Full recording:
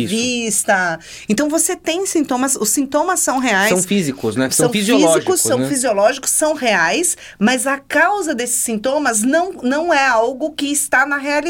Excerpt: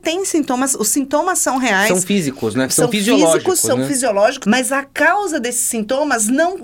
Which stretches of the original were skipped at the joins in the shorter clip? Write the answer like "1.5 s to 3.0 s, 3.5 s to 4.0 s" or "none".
6.2 s to 7.4 s